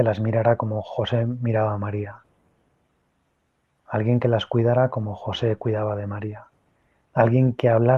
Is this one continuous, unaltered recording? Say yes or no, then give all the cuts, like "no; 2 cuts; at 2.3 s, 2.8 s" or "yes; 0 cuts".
yes; 0 cuts